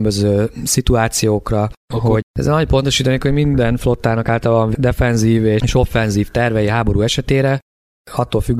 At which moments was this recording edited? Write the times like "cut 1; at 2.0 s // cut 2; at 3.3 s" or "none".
cut 1; at 2.2 s

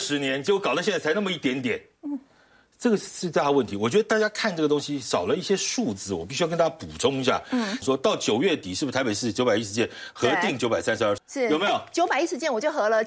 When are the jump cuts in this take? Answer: cut 1; at 7.8 s // cut 2; at 11.2 s

